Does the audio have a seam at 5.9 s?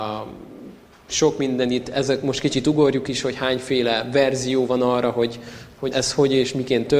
yes; 1 cut; at 5.9 s

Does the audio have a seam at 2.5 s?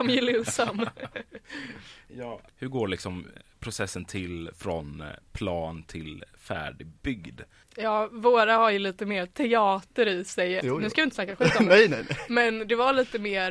yes; 3 cuts; at 2.5 s, 7.6 s, 10.6 s

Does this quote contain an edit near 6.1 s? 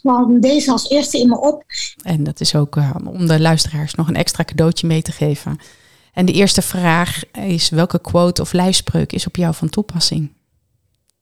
no; 1 cut; at 2.0 s

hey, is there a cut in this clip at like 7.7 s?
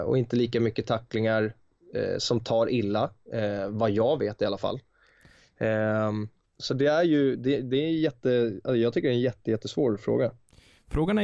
no; 1 cut; at 6.4 s

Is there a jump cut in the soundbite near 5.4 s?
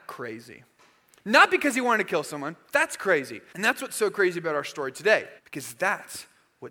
yes; 2 cuts; at 3.5 s, 5.4 s

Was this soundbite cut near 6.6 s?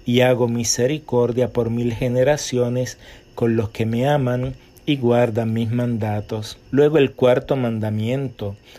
yes; 1 cut; at 6.6 s

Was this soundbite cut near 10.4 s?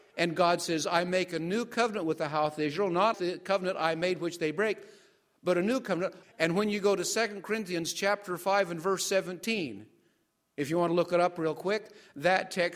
no; 2 cuts; at 3.1 s, 6.2 s

